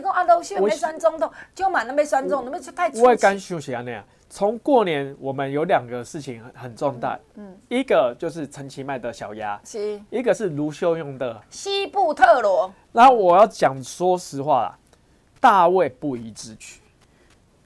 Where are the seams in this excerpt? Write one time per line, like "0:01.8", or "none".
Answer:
0:06.5
0:11.4